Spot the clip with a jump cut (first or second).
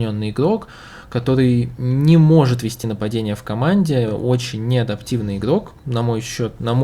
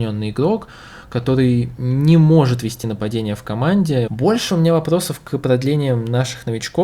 second